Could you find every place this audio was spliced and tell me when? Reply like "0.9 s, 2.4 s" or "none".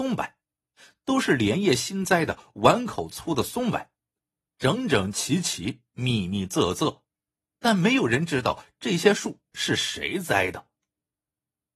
7.5 s